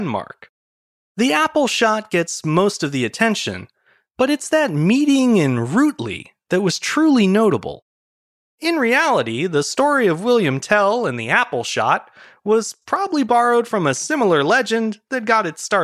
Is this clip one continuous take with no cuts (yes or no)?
no